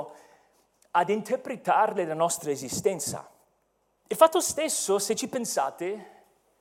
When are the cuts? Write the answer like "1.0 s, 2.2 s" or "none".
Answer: 4.0 s